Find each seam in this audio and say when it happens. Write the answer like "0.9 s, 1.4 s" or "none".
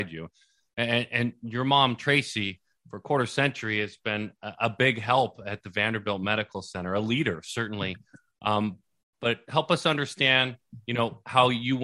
none